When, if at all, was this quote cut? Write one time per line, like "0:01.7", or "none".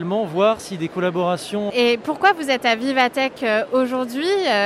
0:01.7